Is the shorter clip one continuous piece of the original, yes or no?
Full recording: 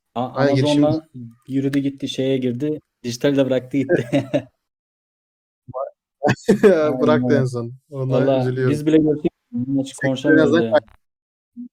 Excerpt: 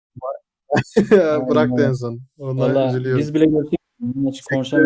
yes